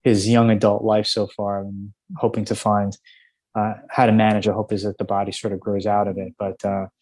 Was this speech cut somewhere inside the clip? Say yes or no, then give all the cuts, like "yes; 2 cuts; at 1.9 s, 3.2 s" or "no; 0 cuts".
yes; 1 cut; at 4.4 s